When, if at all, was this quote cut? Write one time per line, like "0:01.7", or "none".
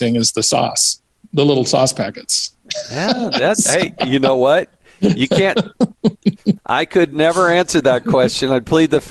none